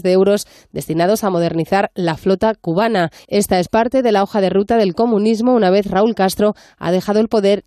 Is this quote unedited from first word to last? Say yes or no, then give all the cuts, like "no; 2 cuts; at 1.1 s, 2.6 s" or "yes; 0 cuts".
no; 1 cut; at 3.2 s